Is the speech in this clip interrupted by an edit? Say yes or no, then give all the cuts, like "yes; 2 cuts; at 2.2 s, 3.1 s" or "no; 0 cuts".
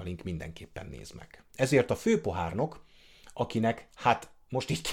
yes; 1 cut; at 1.5 s